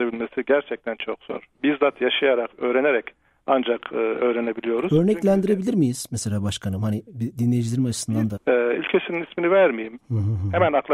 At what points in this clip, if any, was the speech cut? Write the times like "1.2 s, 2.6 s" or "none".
8.4 s, 10.0 s